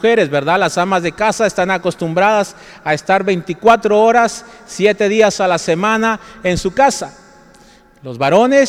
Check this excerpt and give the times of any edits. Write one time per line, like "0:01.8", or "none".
none